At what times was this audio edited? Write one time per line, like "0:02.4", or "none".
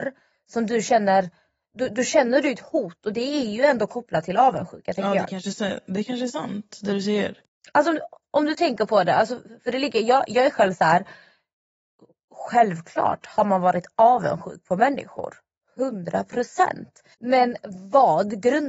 0:17.1

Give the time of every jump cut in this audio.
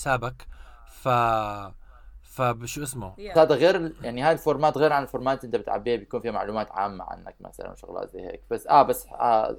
0:03.4

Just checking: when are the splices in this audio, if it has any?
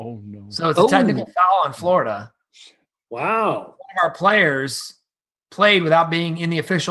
none

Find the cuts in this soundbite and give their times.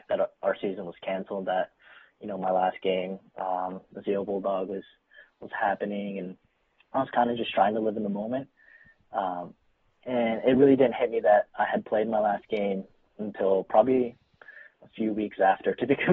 none

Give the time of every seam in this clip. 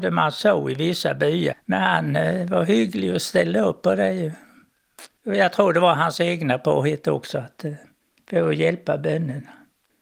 0:01.5
0:05.2

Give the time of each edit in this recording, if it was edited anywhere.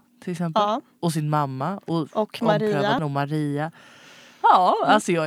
0:03.0

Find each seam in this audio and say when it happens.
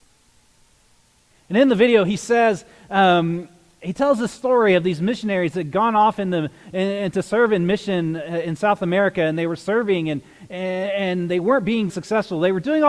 0:01.3
0:11.9

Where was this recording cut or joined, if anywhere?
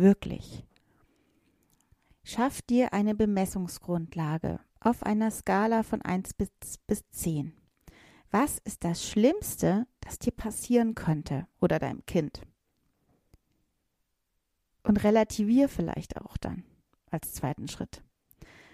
none

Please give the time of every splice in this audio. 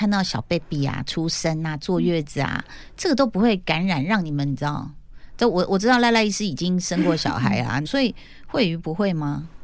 0:07.8

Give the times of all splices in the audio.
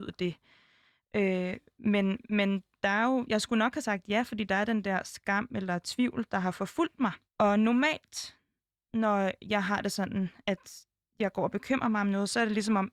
0:07.2

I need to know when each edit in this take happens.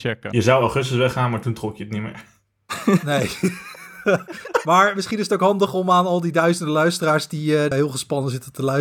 0:07.7

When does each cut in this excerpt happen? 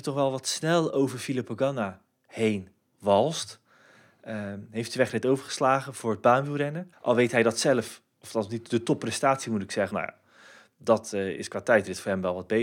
0:06.9
0:09.9

